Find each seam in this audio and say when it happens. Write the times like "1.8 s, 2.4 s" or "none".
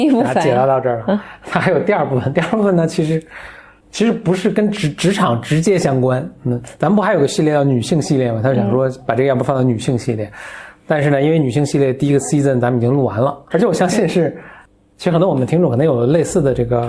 13.5 s